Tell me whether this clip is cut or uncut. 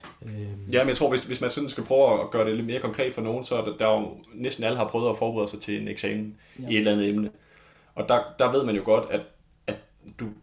uncut